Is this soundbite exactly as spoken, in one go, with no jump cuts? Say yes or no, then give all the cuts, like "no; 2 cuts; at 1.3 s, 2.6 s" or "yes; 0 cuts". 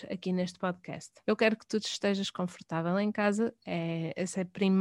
no; 1 cut; at 1.2 s